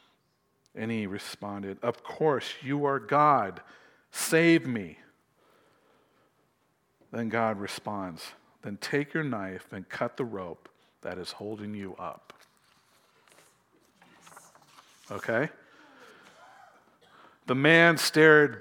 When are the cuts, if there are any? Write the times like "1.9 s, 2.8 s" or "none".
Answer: none